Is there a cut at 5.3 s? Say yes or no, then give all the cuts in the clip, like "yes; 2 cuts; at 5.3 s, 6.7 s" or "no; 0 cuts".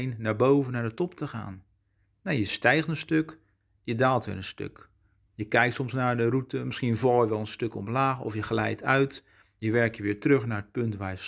yes; 1 cut; at 5.3 s